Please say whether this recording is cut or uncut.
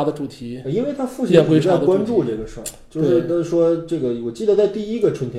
uncut